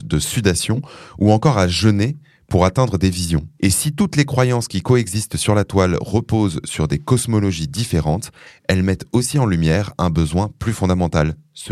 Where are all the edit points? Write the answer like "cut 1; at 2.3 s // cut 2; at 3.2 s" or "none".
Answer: cut 1; at 3.6 s